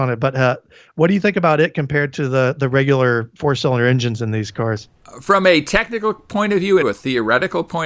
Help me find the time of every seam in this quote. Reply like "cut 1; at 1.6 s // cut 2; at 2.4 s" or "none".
cut 1; at 6.8 s